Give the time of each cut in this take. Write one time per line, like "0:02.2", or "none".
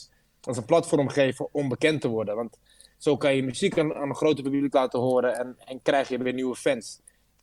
none